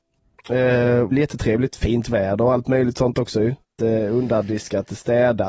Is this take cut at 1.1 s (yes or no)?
yes